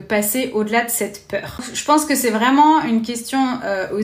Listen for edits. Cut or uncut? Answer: uncut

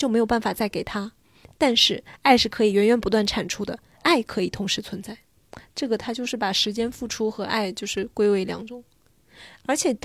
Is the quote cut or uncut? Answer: uncut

